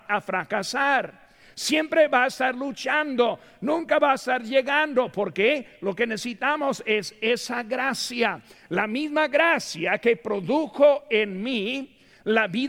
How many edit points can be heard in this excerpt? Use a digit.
0